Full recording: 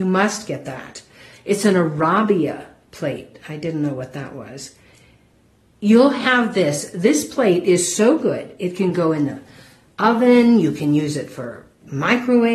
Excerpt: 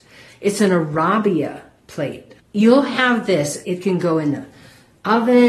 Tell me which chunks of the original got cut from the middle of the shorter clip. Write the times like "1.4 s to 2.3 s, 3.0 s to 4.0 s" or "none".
3.4 s to 5.6 s, 6.9 s to 8.6 s